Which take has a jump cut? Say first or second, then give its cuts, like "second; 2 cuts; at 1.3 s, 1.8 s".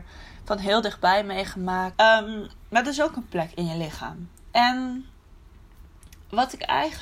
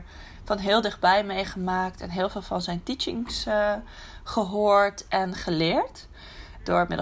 first; 1 cut; at 1.9 s